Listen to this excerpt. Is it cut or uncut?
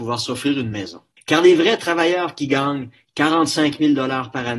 cut